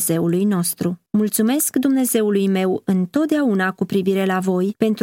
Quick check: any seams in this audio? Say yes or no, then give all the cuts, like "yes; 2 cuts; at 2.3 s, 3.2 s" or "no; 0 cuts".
yes; 1 cut; at 1.1 s